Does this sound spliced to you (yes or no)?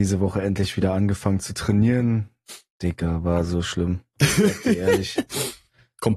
no